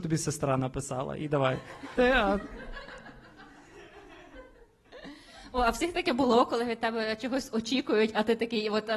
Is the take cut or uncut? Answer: cut